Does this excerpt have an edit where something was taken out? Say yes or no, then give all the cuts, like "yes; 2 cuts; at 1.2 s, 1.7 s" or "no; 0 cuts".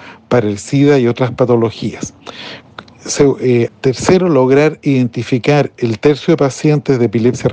yes; 1 cut; at 3.7 s